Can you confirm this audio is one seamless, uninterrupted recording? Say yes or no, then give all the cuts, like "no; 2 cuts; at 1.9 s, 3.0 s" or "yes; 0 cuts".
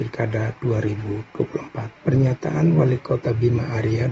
yes; 0 cuts